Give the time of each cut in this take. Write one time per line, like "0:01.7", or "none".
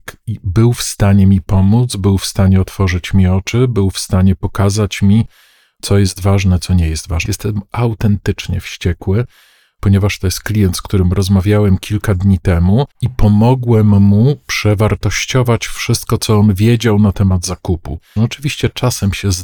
0:07.3
0:12.9
0:18.2

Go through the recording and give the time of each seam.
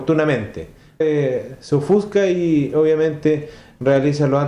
0:01.0

